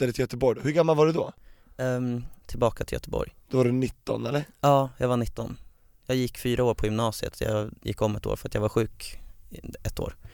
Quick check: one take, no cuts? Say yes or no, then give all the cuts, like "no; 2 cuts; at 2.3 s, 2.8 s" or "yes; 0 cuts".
no; 1 cut; at 2.4 s